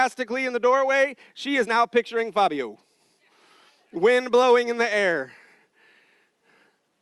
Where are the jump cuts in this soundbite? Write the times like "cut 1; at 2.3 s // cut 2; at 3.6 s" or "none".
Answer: none

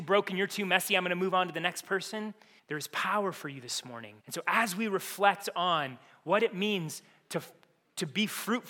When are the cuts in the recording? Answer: cut 1; at 2.6 s // cut 2; at 4.2 s

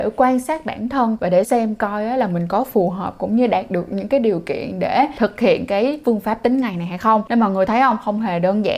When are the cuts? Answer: cut 1; at 1.4 s

